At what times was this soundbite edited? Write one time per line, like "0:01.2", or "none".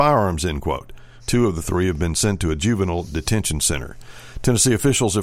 0:01.2